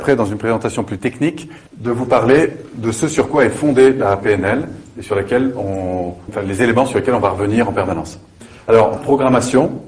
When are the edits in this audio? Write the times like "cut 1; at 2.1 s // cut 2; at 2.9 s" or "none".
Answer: cut 1; at 1.7 s // cut 2; at 6.3 s // cut 3; at 9.0 s